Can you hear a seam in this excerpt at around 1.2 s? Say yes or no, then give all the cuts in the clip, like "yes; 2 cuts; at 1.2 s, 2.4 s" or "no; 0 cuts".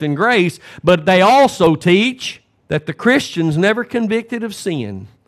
no; 1 cut; at 2.6 s